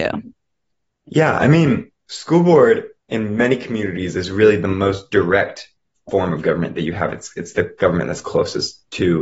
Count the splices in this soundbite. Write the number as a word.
zero